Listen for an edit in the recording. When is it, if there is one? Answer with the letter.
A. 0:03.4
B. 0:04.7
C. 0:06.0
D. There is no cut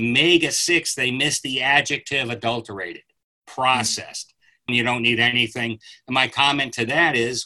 B